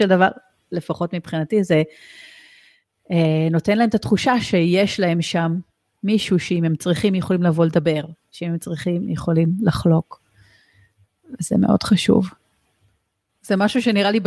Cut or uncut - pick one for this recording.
cut